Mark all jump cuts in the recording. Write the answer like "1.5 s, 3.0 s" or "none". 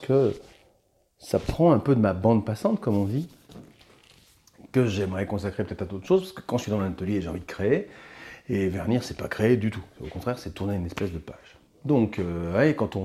none